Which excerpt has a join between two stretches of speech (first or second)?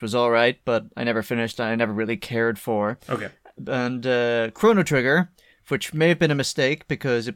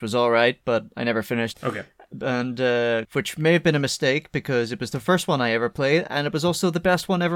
second